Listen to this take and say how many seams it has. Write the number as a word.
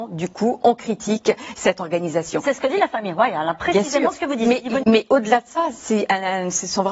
one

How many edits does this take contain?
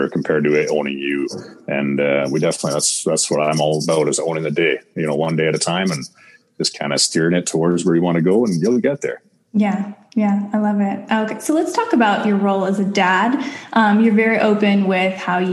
zero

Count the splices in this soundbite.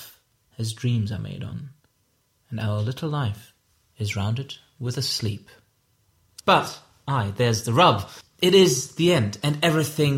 two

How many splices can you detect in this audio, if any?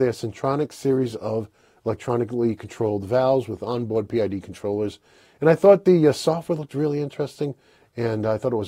zero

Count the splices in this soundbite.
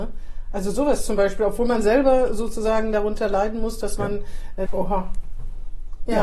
one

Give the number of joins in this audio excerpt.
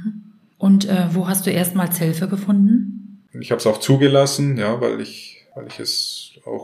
one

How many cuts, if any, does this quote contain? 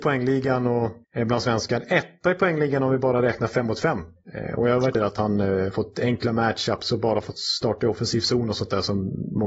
two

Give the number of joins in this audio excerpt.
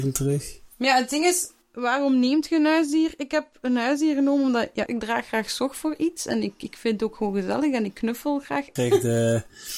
two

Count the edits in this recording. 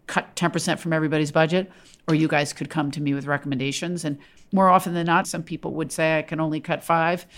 one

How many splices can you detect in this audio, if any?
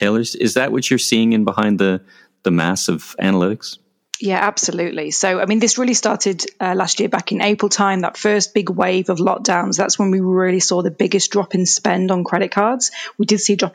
zero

